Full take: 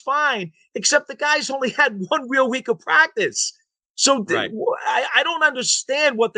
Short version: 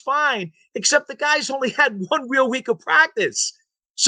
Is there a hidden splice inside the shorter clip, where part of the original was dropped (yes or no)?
no